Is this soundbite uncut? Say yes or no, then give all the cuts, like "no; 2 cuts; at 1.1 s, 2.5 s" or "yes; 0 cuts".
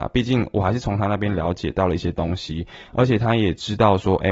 yes; 0 cuts